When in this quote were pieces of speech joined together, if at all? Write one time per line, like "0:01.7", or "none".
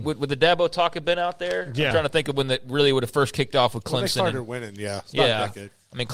none